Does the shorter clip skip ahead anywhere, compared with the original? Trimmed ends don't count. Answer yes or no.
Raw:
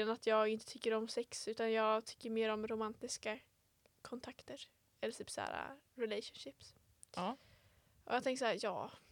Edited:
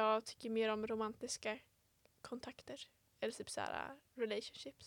no